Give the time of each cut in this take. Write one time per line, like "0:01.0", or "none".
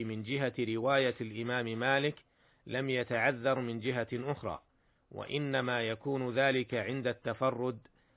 none